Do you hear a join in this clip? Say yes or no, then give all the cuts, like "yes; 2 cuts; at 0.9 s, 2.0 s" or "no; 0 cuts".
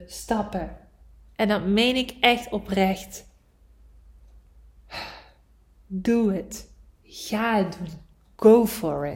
no; 0 cuts